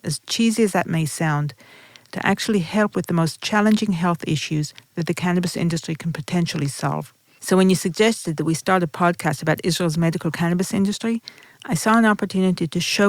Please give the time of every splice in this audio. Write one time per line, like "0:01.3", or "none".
0:02.1